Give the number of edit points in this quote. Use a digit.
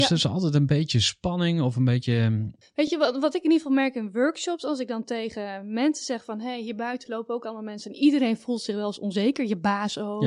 0